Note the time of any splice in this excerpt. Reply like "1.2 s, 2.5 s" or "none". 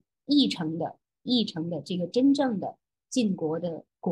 none